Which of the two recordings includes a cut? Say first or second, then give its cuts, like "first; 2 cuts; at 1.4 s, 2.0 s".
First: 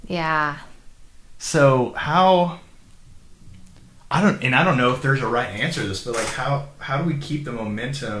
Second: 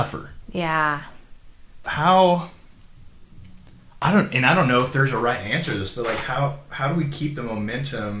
second; 1 cut; at 1.8 s